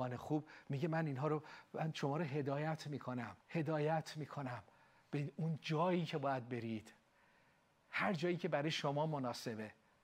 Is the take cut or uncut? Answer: cut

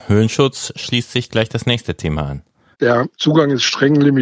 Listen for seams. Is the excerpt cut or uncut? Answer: cut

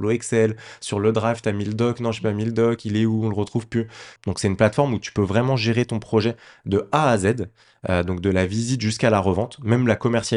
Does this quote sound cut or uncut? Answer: cut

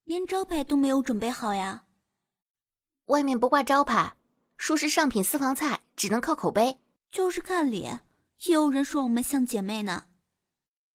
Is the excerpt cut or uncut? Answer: cut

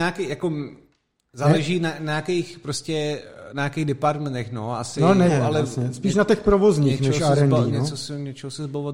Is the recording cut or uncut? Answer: cut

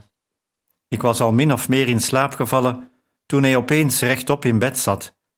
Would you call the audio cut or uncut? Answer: uncut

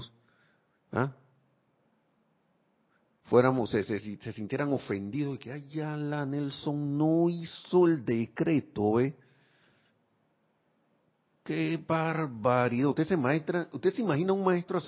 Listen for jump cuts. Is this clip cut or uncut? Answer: cut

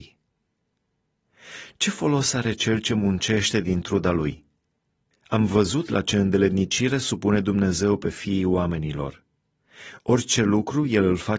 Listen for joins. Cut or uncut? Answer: uncut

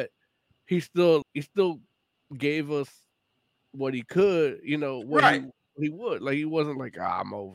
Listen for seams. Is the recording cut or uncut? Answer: cut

